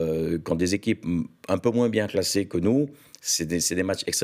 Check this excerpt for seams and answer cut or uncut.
uncut